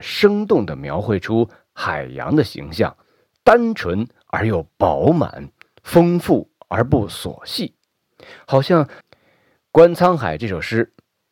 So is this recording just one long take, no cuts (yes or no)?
no